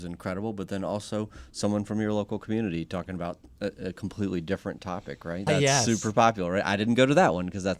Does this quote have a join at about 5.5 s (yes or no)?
yes